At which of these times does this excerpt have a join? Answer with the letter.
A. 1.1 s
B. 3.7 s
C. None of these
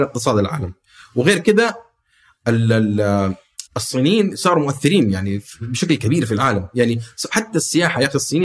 B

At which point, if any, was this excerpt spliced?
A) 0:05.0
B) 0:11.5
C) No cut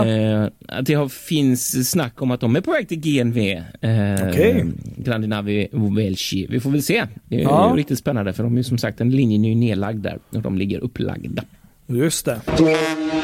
C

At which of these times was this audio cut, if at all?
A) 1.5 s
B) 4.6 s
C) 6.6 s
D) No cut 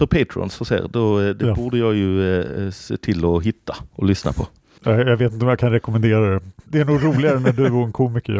C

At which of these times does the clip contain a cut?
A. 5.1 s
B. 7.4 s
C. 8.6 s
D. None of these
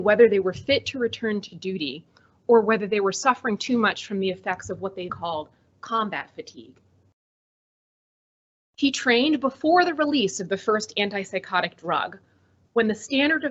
A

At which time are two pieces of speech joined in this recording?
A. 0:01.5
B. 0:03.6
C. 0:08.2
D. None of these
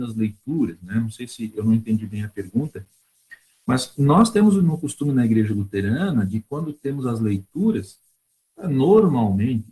D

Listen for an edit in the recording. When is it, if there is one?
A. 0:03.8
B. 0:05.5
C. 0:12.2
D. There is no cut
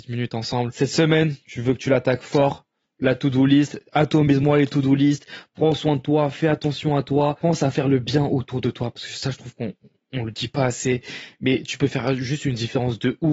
D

